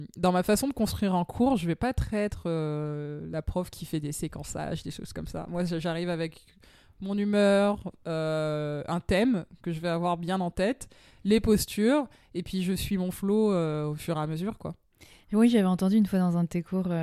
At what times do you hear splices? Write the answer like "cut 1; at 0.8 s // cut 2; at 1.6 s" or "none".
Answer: none